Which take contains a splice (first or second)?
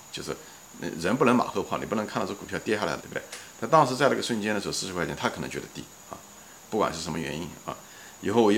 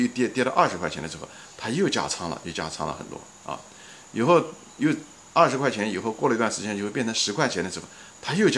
first